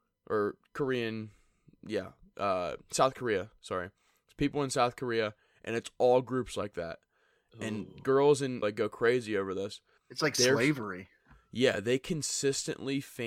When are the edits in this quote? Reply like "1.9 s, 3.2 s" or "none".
8.6 s, 10.0 s